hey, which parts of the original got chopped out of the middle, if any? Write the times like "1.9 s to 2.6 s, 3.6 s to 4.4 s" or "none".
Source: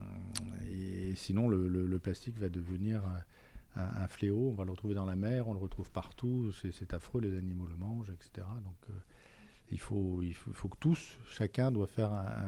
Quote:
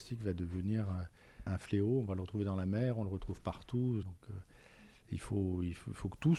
3.6 s to 4.0 s, 6.5 s to 8.6 s